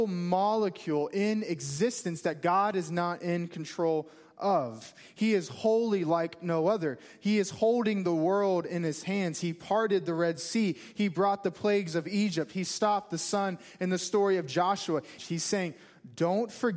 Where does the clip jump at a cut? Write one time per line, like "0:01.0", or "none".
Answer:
0:15.2